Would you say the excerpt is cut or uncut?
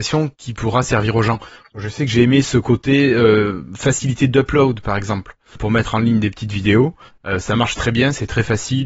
cut